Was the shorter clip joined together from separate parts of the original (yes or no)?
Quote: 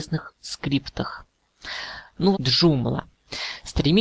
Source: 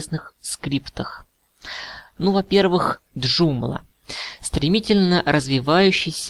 yes